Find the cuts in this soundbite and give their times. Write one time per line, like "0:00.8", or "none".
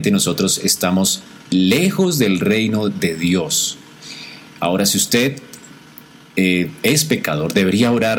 none